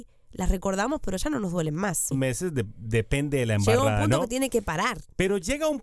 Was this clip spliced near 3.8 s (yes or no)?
no